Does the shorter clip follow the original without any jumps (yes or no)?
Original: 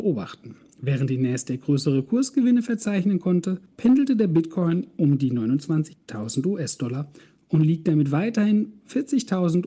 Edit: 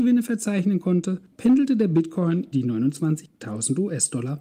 no